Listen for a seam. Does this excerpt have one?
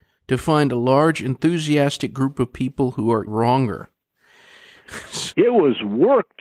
yes; 2 cuts; at 3.3 s, 5.3 s

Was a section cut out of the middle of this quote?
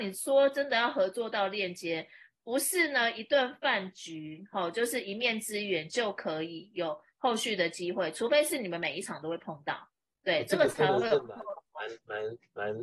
no; 0 cuts

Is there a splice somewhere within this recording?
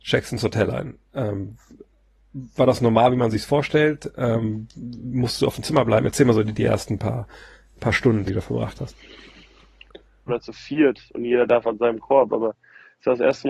yes; 2 cuts; at 8.3 s, 10.3 s

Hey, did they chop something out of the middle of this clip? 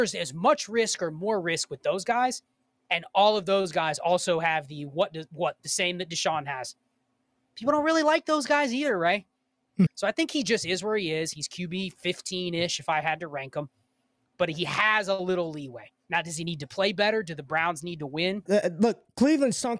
yes; 2 cuts; at 9.9 s, 18.5 s

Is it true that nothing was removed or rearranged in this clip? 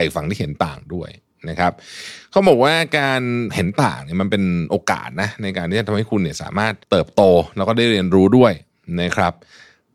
no; 2 cuts; at 3.5 s, 6.8 s

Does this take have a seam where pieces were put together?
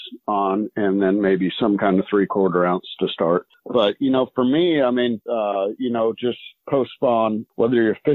yes; 2 cuts; at 3.5 s, 5.3 s

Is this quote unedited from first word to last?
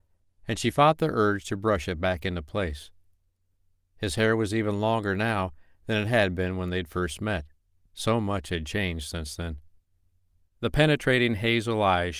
no; 2 cuts; at 7.9 s, 10.4 s

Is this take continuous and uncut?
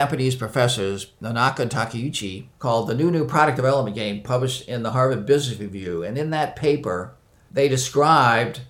no; 3 cuts; at 1.2 s, 2.5 s, 7.5 s

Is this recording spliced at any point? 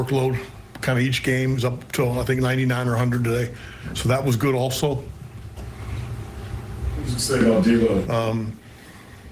yes; 2 cuts; at 5.6 s, 8.0 s

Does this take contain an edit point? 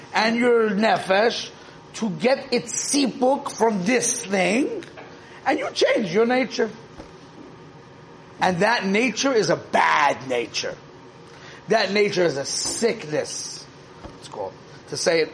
yes; 1 cut; at 14.2 s

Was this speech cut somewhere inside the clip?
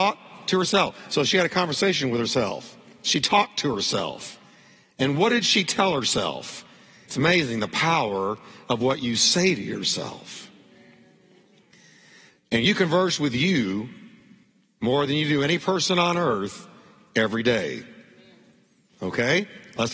yes; 1 cut; at 7.1 s

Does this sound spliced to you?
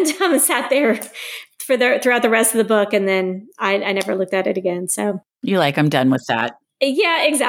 no; 0 cuts

